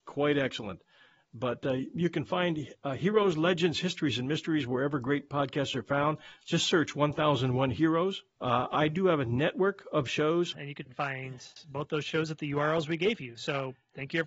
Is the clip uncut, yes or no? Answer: no